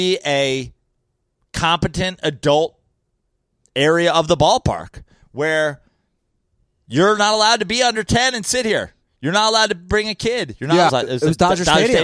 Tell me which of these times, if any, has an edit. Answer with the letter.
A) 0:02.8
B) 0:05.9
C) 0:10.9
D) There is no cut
C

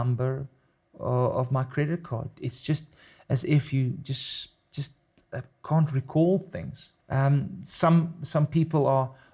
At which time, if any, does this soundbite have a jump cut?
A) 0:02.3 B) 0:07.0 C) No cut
B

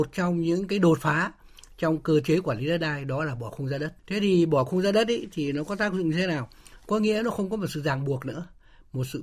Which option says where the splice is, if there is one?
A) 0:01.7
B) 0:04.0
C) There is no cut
B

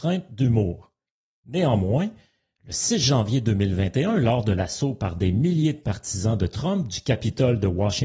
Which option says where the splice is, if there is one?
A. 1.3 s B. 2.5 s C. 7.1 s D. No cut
D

